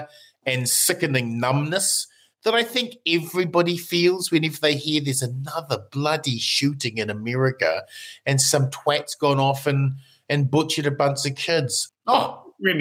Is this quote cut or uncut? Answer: cut